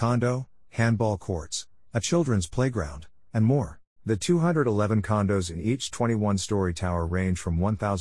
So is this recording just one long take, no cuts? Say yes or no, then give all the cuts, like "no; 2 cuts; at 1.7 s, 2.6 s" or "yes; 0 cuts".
no; 1 cut; at 4.0 s